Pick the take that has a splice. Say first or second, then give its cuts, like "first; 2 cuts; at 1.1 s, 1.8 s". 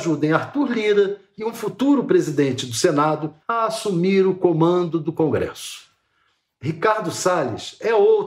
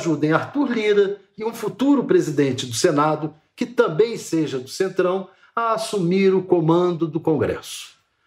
first; 1 cut; at 3.4 s